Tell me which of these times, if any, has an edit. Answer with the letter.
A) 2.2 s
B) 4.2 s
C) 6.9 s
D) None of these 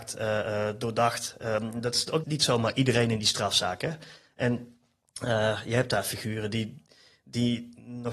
A